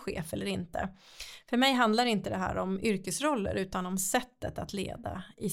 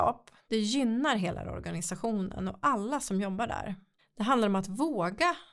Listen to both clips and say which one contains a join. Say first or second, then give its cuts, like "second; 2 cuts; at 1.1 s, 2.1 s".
second; 1 cut; at 4.0 s